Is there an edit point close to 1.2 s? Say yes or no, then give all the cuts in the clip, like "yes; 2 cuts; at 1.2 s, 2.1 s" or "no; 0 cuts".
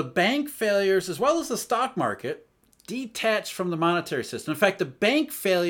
no; 0 cuts